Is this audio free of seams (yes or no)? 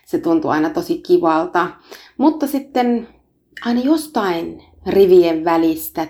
yes